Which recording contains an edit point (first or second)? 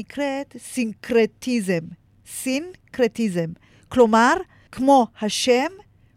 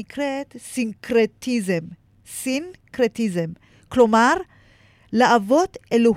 first